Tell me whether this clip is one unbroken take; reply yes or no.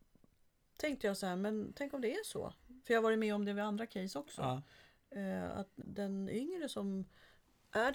no